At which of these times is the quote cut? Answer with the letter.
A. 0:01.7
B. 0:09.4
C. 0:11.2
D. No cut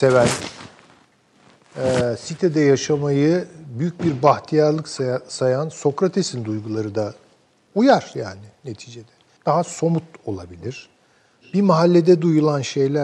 B